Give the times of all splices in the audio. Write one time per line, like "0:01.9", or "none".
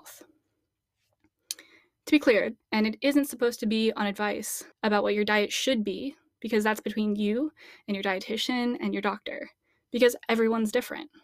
0:02.6
0:04.7

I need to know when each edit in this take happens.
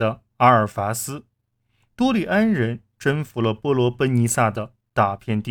none

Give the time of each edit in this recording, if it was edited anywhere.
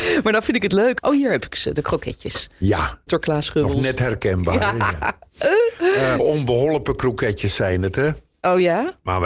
0:01.0
0:03.1
0:06.2

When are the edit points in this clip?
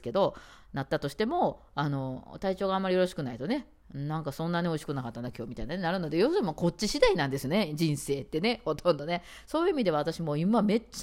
none

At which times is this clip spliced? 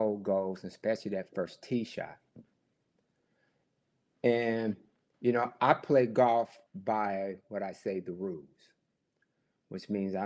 0:06.7

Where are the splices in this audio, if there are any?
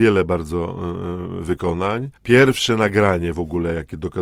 0:02.2

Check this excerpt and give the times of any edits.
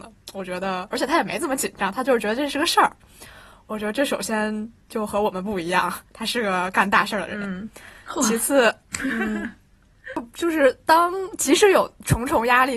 none

